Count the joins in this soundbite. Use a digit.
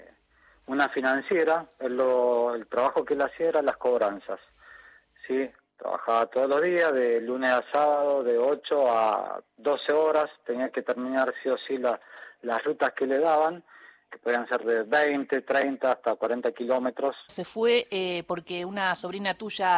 2